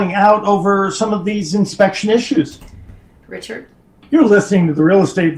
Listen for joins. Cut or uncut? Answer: cut